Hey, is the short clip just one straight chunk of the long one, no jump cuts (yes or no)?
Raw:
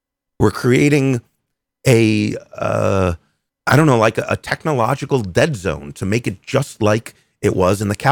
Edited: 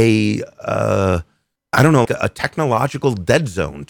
no